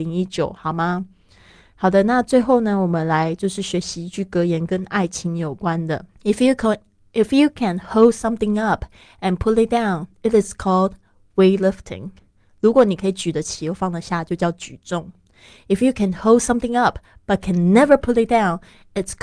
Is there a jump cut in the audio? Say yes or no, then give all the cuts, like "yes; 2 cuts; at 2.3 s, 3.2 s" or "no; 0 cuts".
yes; 1 cut; at 6.1 s